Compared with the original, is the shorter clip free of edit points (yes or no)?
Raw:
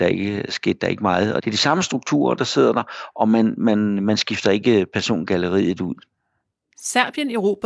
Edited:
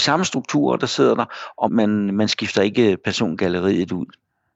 no